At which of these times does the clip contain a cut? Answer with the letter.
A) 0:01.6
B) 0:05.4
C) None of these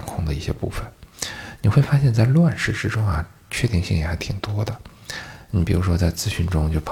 C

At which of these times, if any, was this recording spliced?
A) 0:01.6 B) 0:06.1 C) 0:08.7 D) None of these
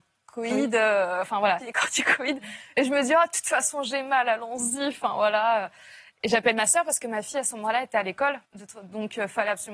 A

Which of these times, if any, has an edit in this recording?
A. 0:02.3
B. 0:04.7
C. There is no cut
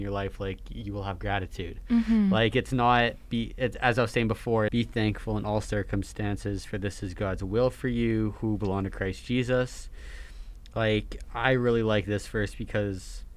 B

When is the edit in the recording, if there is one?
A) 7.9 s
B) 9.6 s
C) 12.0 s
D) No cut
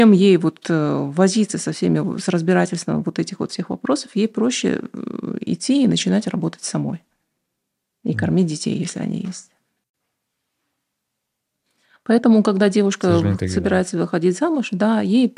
D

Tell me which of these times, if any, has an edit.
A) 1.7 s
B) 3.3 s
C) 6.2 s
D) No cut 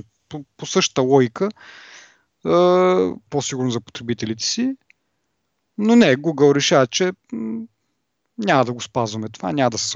B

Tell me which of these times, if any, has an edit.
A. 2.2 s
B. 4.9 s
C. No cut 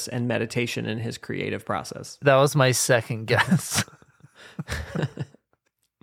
C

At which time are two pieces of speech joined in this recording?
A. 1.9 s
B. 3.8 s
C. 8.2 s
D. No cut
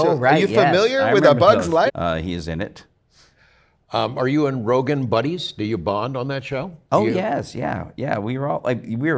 A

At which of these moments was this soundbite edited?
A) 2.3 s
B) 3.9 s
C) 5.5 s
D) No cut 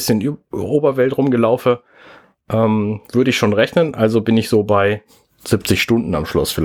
D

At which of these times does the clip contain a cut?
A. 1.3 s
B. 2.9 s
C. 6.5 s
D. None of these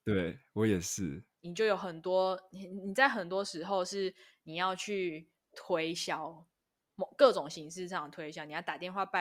A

